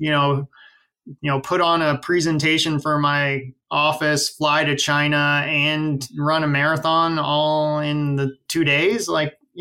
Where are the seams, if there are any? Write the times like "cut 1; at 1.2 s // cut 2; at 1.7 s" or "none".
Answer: cut 1; at 1.2 s // cut 2; at 8.5 s